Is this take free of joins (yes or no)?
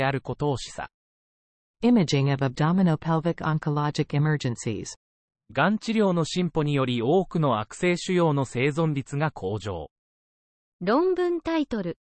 no